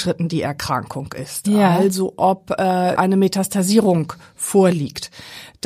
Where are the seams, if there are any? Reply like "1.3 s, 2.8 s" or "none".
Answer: 3.0 s